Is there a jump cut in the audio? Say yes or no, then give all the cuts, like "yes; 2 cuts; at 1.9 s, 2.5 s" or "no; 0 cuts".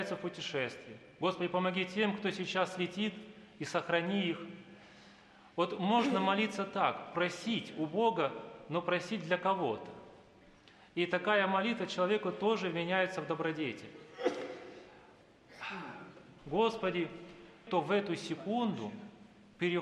yes; 2 cuts; at 16.4 s, 17.7 s